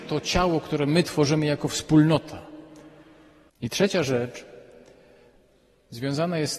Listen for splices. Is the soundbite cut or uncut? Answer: cut